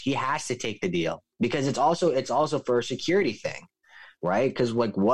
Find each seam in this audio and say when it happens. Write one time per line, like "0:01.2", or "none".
0:01.3